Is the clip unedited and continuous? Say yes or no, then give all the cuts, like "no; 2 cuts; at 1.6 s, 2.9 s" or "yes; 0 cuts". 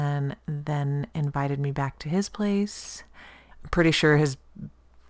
no; 1 cut; at 3.5 s